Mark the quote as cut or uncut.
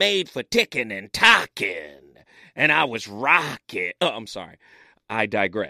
uncut